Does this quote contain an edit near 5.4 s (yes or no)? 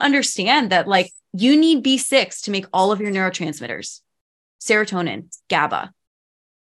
yes